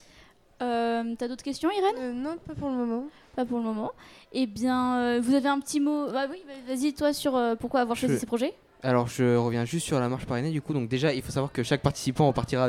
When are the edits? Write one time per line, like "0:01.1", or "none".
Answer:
none